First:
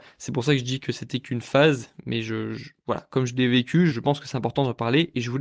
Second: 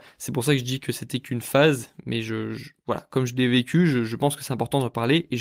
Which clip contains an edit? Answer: first; 1 cut; at 3.9 s

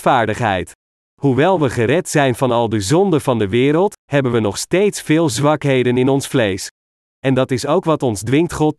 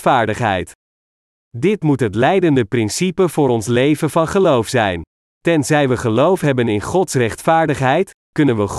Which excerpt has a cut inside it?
first; 2 cuts; at 1.0 s, 7.1 s

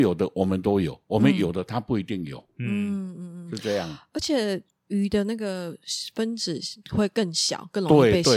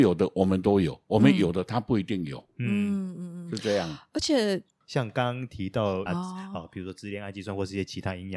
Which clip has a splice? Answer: second; 2 cuts; at 4.8 s, 6.1 s

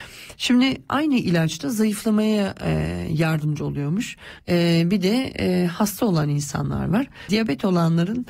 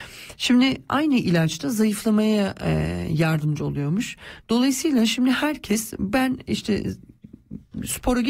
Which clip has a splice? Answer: first; 2 cuts; at 4.4 s, 7.3 s

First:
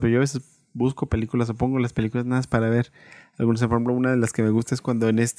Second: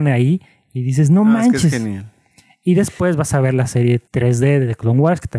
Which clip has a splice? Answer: second; 1 cut; at 4.1 s

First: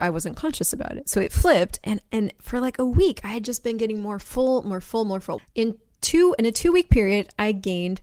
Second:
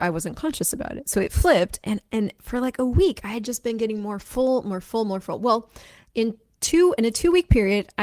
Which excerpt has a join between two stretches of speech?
first; 1 cut; at 5.4 s

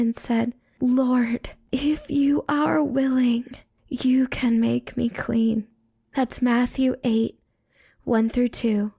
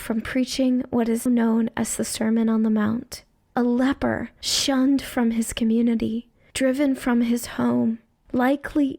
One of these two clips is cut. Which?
second; 1 cut; at 1.3 s

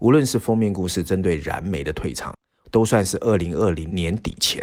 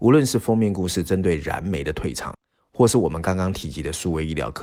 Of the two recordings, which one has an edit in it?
first; 1 cut; at 2.6 s

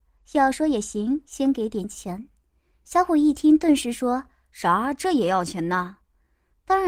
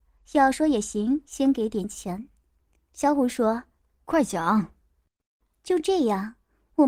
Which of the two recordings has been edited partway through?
second; 1 cut; at 2.5 s

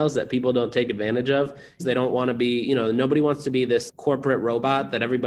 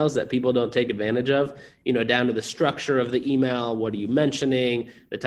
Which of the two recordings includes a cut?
first; 2 cuts; at 1.8 s, 3.9 s

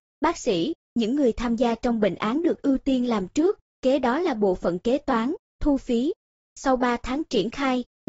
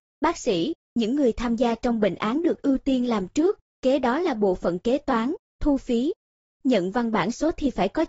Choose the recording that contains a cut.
first; 1 cut; at 6.4 s

